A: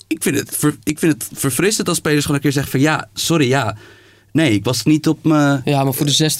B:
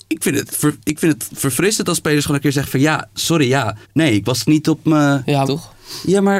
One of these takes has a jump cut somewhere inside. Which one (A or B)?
B